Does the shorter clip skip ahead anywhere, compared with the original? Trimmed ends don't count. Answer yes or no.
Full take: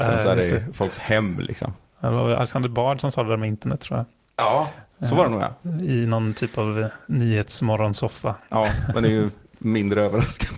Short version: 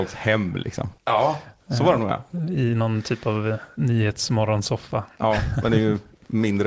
yes